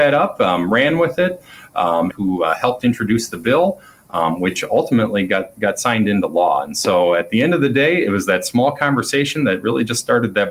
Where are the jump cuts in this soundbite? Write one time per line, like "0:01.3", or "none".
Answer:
0:02.1

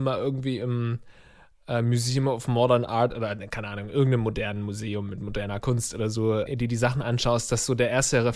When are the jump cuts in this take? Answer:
0:06.5

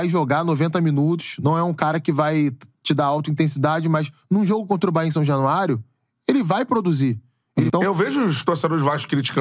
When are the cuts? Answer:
0:07.7

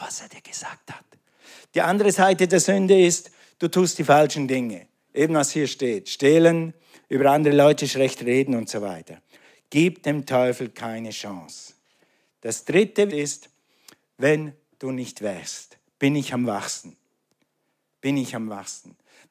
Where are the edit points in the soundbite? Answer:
0:13.1

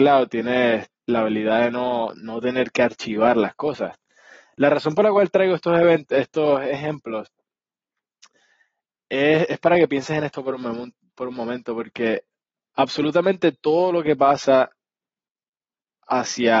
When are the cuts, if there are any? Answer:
none

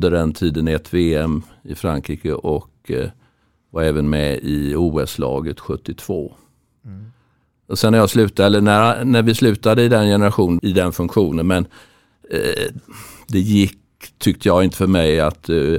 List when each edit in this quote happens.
0:10.6

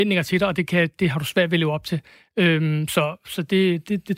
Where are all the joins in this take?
none

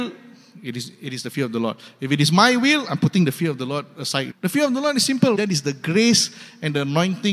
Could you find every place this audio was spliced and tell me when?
0:04.3
0:05.3

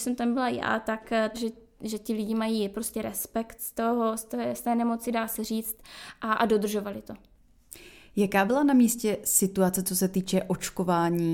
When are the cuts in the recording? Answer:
0:01.3

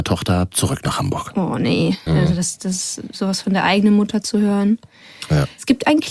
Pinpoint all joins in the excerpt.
0:02.1

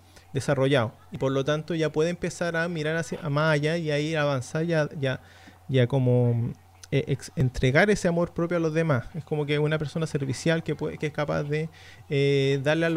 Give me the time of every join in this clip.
none

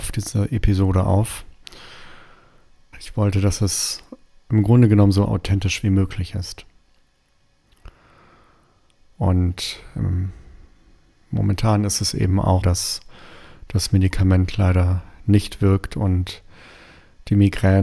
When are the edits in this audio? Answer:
0:02.9
0:09.1
0:12.6

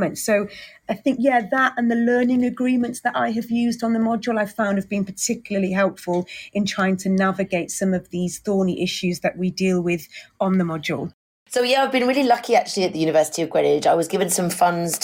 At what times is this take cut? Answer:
none

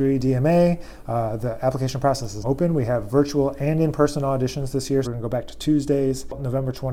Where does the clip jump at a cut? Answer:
0:02.4
0:05.0

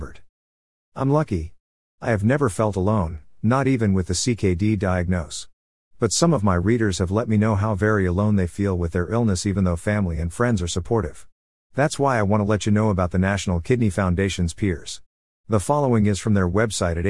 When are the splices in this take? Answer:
none

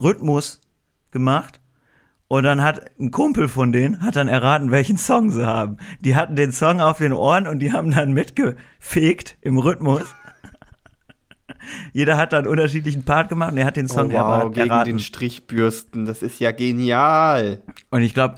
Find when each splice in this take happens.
none

